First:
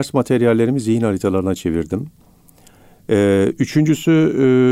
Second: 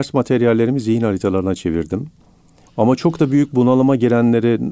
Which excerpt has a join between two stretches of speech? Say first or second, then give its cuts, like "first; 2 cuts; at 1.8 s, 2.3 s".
second; 1 cut; at 2.7 s